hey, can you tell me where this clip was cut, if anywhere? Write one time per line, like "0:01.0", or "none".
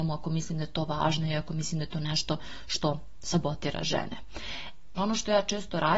0:05.0